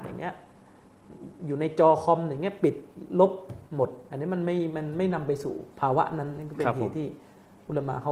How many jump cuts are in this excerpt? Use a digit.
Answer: 2